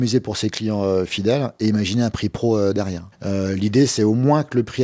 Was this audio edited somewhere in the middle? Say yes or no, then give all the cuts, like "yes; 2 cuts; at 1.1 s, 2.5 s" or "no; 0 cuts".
yes; 1 cut; at 3.1 s